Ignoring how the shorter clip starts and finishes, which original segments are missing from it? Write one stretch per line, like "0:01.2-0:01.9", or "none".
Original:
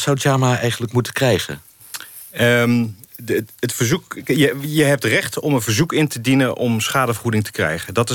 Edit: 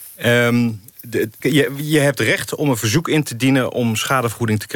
0:03.6-0:04.2